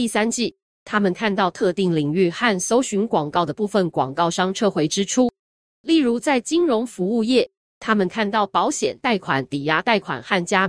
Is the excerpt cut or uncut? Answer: uncut